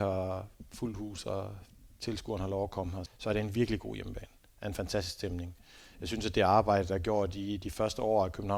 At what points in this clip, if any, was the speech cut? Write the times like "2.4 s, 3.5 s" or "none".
3.1 s